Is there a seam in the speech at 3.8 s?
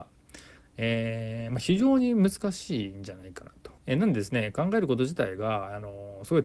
yes; 1 cut; at 3.8 s

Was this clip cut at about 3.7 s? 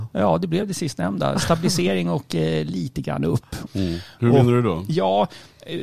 yes; 1 cut; at 3.7 s

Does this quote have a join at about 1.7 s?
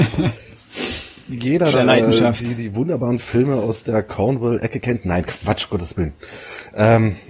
yes; 1 cut; at 1.7 s

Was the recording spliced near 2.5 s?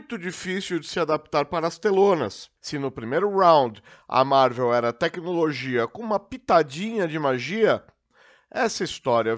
no; 0 cuts

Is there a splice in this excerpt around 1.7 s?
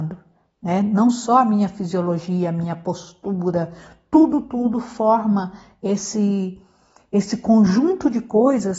no; 1 cut; at 4.4 s

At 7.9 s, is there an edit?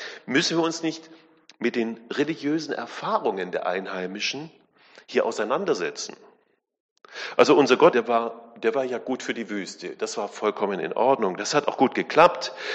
yes; 1 cut; at 7.9 s

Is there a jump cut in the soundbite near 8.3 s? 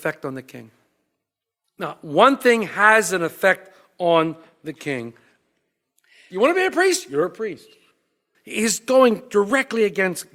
yes; 2 cuts; at 6.3 s, 8.3 s

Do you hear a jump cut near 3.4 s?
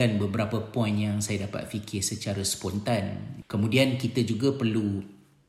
yes; 1 cut; at 3.4 s

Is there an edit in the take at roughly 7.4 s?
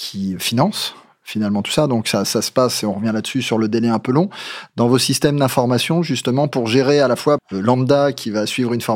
yes; 1 cut; at 7.4 s

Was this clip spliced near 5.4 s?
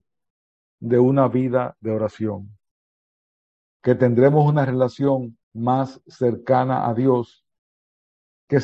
yes; 2 cuts; at 3.6 s, 5.4 s

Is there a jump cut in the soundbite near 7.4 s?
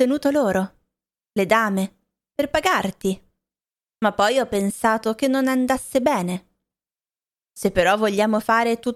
no; 1 cut; at 3.9 s

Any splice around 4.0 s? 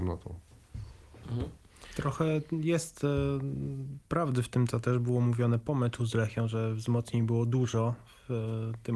yes; 1 cut; at 4.0 s

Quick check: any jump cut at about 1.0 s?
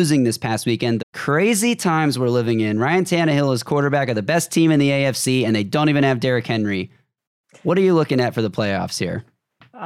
yes; 1 cut; at 1.0 s

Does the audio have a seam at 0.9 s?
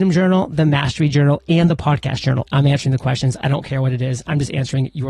no; 1 cut; at 2.4 s

